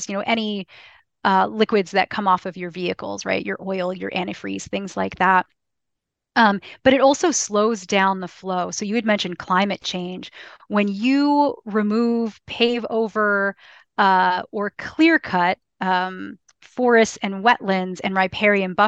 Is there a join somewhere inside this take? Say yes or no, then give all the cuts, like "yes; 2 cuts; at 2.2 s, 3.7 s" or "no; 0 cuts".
no; 0 cuts